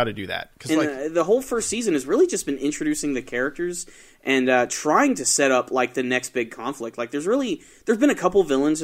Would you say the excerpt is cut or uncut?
uncut